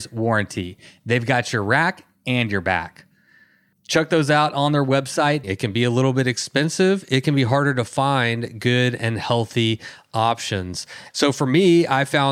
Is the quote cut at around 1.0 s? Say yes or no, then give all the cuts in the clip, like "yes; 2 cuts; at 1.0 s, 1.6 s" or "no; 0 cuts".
no; 2 cuts; at 5.4 s, 11.1 s